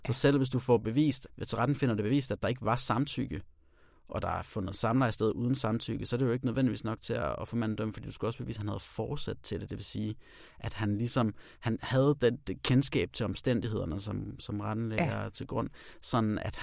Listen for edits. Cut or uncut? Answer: cut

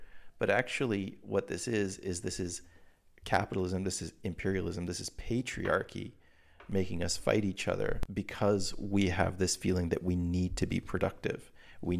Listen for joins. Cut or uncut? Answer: uncut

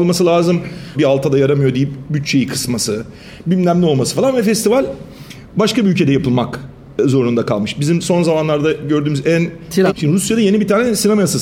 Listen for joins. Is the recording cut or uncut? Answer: cut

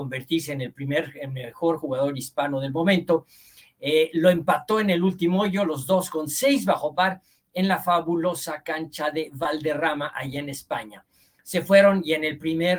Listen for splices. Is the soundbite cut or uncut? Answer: uncut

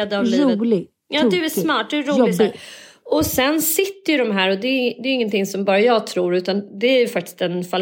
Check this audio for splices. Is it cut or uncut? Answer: uncut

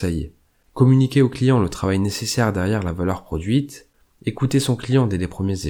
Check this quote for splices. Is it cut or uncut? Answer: uncut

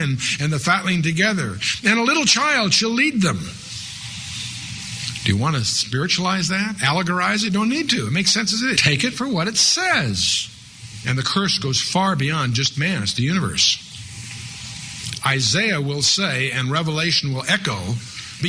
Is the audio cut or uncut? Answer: cut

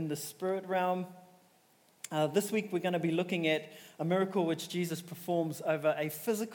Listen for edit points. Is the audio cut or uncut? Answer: uncut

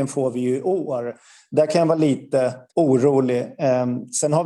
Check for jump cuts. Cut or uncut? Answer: cut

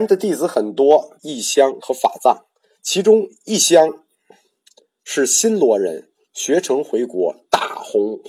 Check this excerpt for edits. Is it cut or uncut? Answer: cut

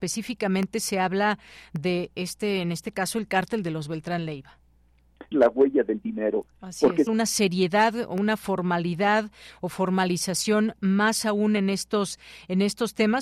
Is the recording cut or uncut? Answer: cut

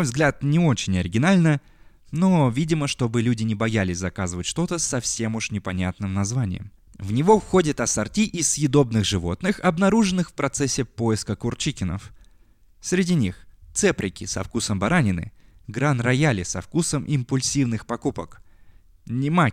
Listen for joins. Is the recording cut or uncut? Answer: cut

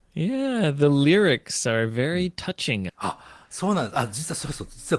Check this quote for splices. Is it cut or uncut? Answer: cut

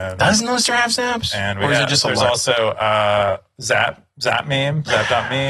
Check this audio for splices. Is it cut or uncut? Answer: uncut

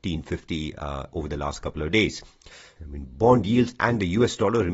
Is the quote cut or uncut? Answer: cut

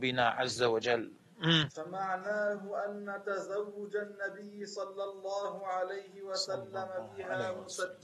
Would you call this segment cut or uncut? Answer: cut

